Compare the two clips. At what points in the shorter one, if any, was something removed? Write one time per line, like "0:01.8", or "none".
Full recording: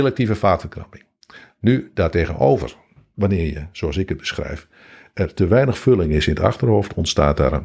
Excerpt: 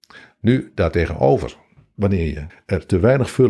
0:02.5